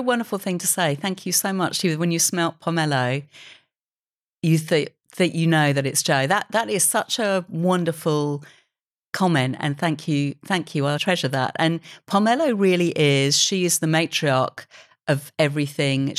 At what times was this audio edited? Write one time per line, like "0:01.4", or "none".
0:11.0